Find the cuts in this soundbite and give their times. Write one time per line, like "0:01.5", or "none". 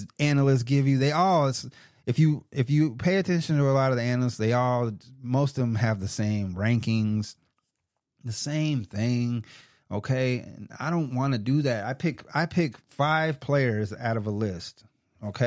none

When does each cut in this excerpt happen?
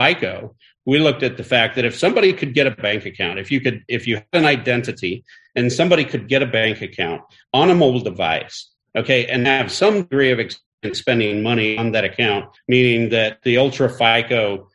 0:12.6

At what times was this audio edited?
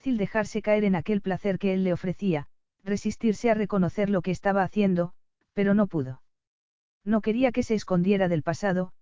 none

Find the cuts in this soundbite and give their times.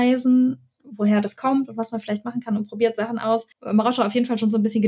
0:03.5

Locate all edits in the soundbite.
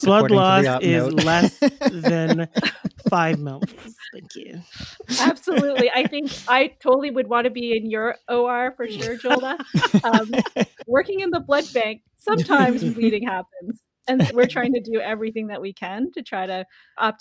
0:10.8
0:14.3

